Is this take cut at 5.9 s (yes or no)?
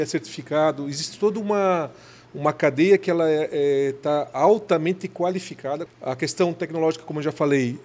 yes